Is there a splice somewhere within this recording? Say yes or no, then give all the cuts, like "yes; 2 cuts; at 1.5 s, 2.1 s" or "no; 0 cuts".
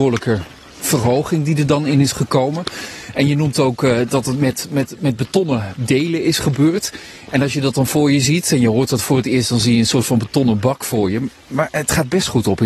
no; 0 cuts